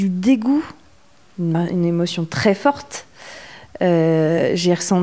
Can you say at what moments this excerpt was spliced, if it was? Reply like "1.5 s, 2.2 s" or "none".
none